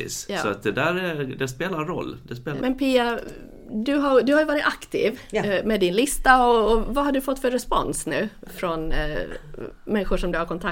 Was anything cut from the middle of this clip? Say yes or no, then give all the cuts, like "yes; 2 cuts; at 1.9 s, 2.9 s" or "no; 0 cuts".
yes; 1 cut; at 2.6 s